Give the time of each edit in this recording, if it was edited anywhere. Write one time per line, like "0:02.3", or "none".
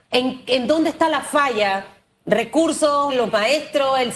0:03.1